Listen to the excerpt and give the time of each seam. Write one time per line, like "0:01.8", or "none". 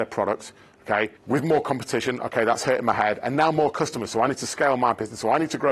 0:01.2

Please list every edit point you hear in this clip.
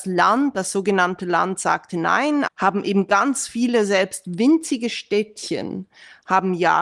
0:02.5

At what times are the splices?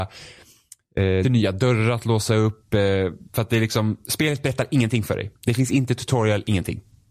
0:01.2
0:05.3

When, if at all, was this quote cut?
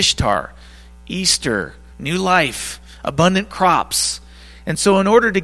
0:01.9

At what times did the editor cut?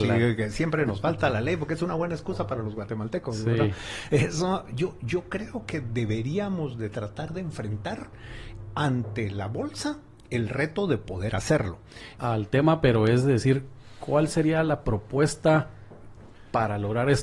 0:12.2

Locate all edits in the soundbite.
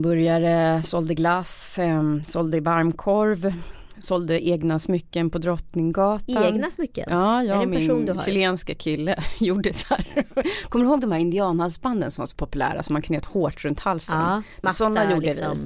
0:14.6

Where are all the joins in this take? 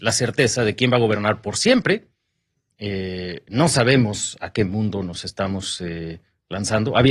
none

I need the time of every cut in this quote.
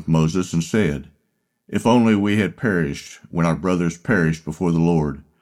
none

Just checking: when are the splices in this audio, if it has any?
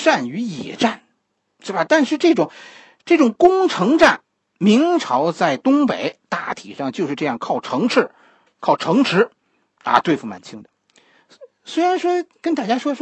0:04.5

